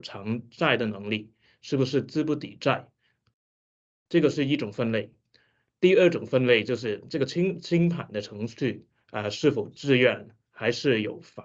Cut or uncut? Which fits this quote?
uncut